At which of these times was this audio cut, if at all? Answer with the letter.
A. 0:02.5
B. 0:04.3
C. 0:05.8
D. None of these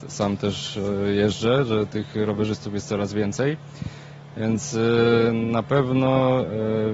D